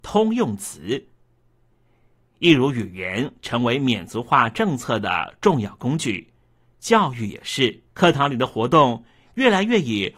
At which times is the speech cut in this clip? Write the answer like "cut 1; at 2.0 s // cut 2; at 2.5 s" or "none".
cut 1; at 7.9 s